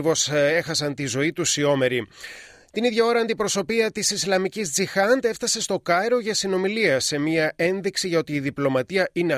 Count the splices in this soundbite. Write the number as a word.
zero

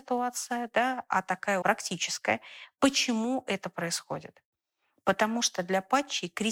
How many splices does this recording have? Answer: one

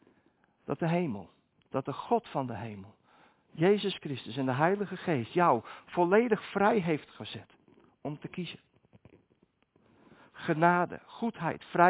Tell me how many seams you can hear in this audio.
zero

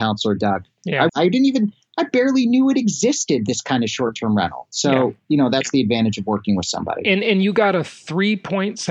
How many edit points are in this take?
one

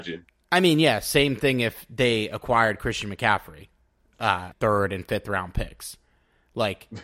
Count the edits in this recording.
one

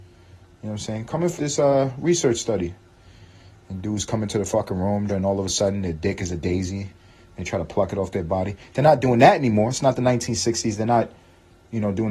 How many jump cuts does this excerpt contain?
two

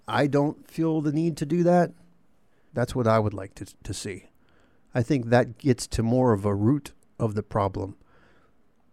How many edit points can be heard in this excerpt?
one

